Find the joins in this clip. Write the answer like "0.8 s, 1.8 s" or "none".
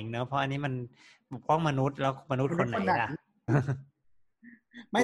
3.5 s